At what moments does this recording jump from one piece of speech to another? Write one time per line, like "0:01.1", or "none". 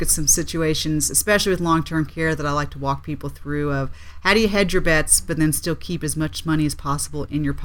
none